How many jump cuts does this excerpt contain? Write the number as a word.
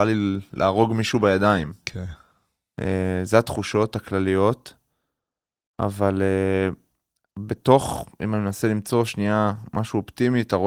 zero